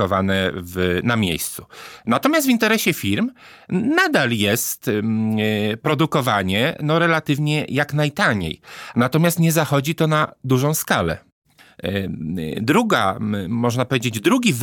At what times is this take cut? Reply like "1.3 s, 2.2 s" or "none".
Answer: 8.9 s

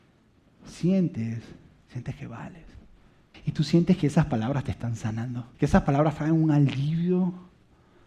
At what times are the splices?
3.3 s, 5.5 s

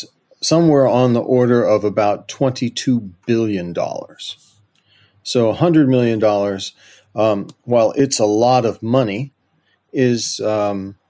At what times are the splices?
none

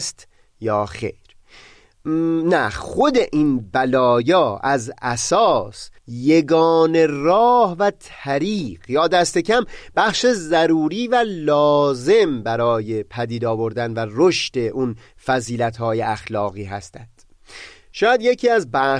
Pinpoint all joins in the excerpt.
6.0 s

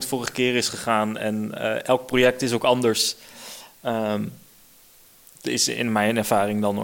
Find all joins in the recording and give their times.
none

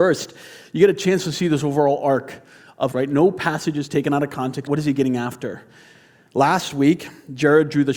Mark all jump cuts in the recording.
2.9 s, 4.7 s

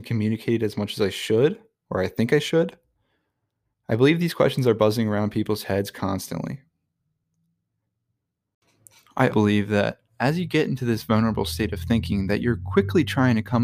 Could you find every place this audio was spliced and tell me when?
9.3 s

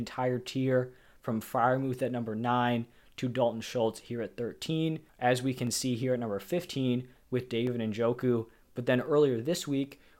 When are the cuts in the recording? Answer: 5.1 s, 8.6 s

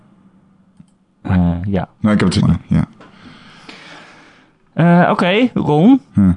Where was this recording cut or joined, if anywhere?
2.4 s

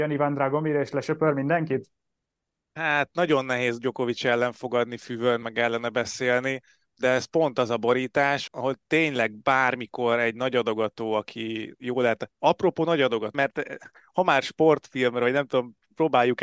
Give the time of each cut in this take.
5.4 s, 8.5 s, 13.3 s

